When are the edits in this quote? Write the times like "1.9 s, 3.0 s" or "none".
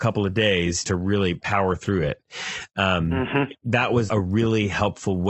4.1 s